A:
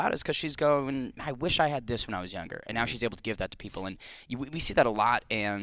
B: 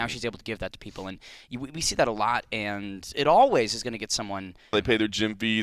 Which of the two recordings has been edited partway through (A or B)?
B